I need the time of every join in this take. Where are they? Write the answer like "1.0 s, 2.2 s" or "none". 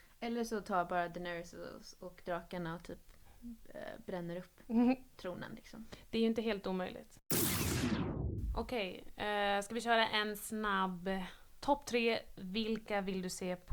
none